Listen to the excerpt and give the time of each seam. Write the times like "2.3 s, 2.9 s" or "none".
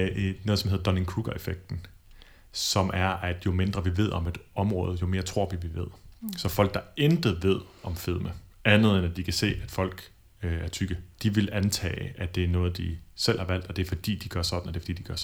11.1 s